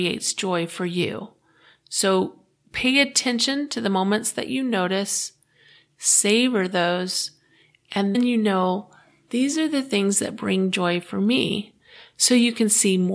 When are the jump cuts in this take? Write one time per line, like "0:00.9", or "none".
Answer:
0:08.1